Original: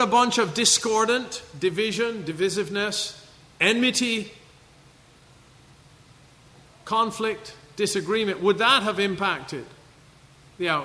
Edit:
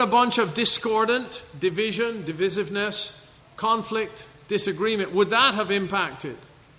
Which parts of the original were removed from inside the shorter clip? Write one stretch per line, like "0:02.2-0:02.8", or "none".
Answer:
0:03.4-0:06.7